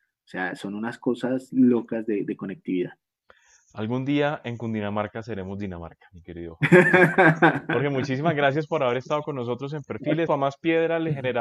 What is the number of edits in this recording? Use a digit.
1